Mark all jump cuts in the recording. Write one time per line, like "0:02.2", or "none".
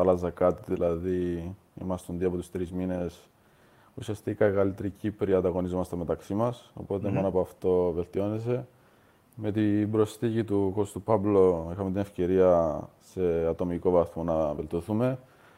none